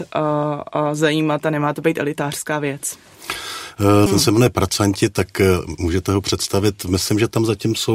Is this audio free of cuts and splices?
no; 1 cut; at 4.1 s

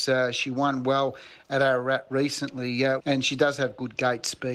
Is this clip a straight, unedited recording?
no; 1 cut; at 3.0 s

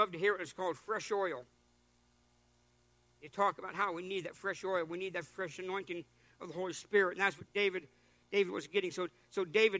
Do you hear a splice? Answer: no; 0 cuts

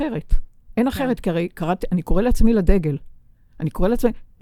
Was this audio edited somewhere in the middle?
no; 0 cuts

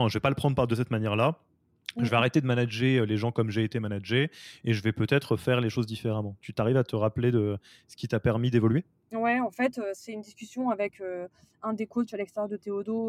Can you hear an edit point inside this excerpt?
no; 0 cuts

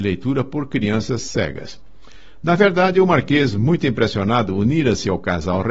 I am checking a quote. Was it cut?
no; 0 cuts

